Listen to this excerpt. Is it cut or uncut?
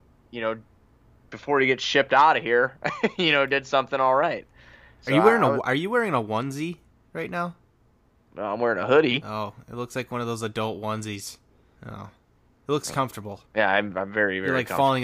cut